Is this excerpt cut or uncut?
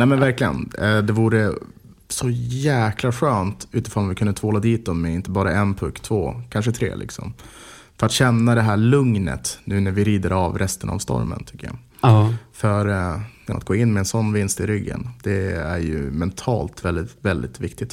cut